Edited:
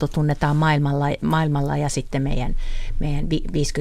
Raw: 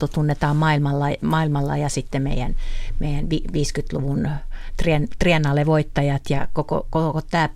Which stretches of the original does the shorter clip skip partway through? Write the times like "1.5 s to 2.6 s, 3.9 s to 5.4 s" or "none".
none